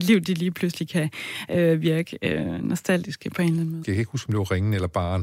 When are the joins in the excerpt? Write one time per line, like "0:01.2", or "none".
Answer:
0:03.8